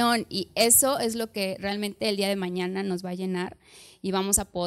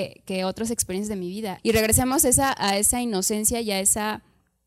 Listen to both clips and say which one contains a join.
second; 1 cut; at 1.6 s

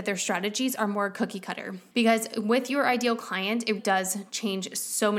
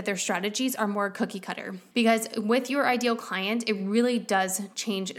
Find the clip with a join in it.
first; 1 cut; at 3.8 s

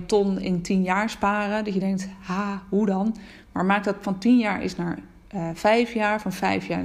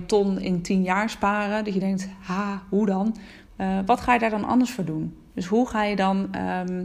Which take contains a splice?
second; 1 cut; at 3.4 s

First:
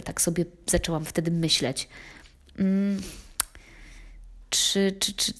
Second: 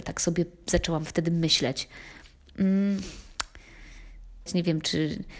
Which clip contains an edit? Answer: second; 1 cut; at 4.5 s

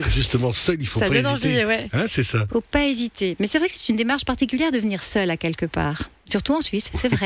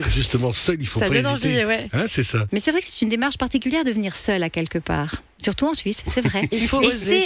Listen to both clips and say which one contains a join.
second; 1 cut; at 2.5 s

